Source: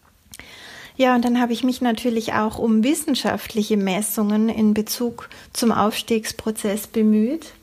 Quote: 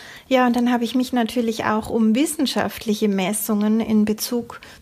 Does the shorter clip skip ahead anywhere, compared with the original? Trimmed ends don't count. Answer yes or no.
no